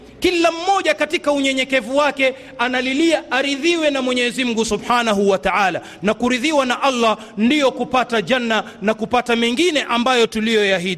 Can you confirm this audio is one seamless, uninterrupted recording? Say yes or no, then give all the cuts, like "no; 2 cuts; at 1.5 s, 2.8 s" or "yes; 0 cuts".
yes; 0 cuts